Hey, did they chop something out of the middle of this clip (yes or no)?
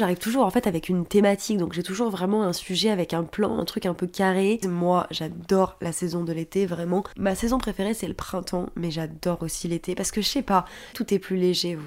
yes